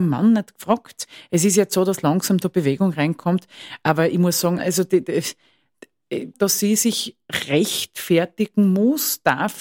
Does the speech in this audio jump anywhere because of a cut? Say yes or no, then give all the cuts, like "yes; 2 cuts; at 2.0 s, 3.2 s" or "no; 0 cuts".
yes; 2 cuts; at 4.6 s, 6.3 s